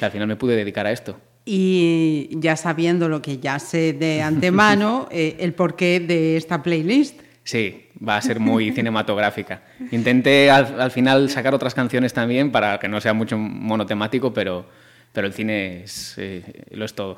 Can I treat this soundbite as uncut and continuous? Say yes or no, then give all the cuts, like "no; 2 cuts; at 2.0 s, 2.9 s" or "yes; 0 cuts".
yes; 0 cuts